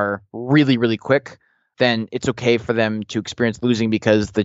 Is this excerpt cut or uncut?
cut